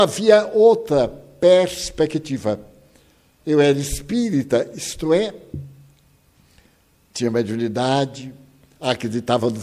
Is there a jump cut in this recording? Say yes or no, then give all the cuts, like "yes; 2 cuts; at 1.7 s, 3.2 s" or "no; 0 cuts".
no; 0 cuts